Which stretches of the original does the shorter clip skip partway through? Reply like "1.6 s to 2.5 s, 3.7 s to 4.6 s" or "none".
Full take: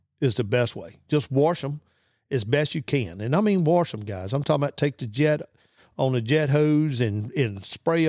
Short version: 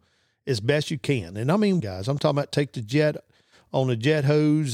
3.6 s to 4.1 s